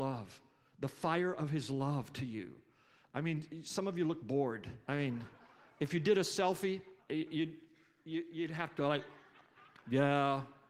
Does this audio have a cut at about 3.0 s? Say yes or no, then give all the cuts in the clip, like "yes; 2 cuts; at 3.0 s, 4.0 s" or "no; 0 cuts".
no; 2 cuts; at 4.8 s, 7.0 s